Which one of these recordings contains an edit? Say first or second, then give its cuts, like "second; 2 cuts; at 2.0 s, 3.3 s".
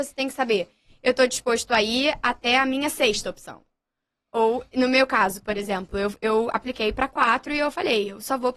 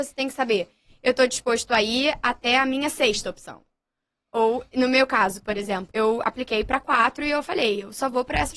second; 1 cut; at 5.9 s